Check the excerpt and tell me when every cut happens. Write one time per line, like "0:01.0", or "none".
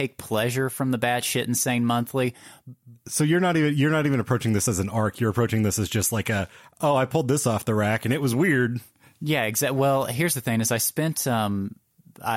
none